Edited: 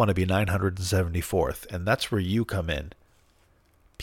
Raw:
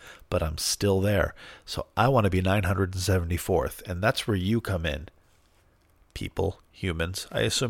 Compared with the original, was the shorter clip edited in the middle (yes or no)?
no